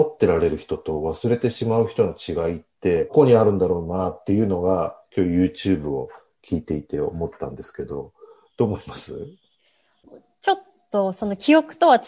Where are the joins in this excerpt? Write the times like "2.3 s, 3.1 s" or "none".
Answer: none